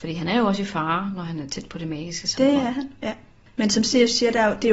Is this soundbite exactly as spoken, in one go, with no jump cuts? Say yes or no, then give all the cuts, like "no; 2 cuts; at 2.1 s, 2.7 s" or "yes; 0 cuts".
yes; 0 cuts